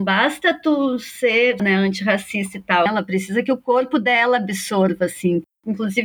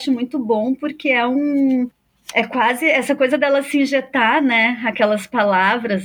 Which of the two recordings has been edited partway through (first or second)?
first